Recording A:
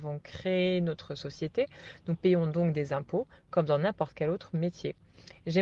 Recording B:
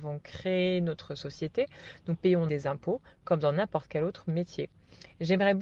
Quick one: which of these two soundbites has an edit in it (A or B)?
B